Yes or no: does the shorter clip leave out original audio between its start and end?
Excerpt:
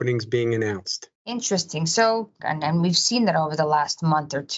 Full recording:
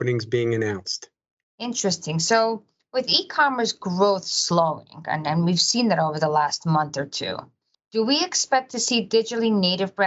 yes